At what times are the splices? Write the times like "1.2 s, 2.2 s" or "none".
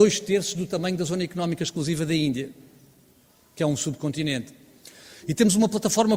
none